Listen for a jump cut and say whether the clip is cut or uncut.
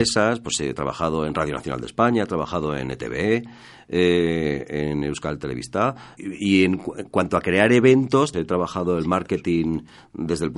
cut